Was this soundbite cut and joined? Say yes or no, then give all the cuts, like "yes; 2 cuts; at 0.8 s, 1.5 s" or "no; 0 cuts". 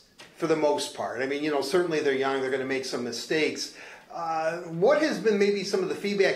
no; 0 cuts